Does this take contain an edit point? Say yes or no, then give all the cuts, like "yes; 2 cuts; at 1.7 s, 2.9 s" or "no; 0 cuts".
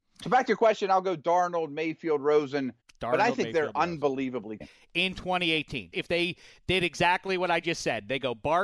yes; 2 cuts; at 4.6 s, 5.9 s